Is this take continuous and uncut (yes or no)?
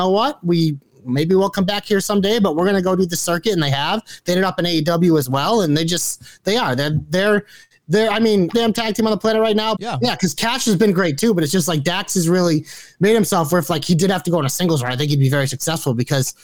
no